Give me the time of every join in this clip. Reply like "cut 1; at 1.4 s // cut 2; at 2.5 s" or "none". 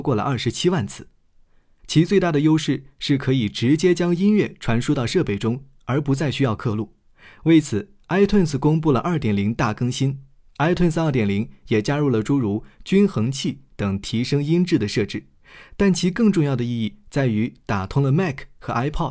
cut 1; at 1.8 s // cut 2; at 10.5 s